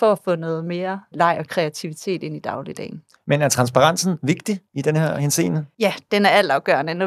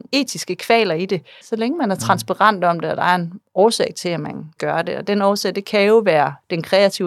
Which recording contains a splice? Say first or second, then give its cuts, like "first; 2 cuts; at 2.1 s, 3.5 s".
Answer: second; 1 cut; at 1.4 s